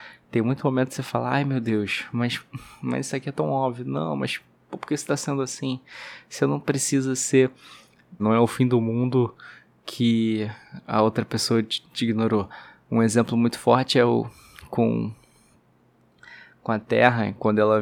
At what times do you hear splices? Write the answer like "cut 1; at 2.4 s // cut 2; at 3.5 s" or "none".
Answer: cut 1; at 8.2 s